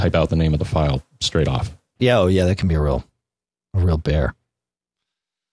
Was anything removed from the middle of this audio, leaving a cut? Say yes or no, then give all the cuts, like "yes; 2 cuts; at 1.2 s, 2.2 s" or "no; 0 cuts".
yes; 1 cut; at 2.0 s